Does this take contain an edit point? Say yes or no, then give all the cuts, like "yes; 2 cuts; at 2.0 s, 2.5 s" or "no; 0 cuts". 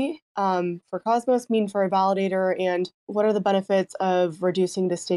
yes; 1 cut; at 3.0 s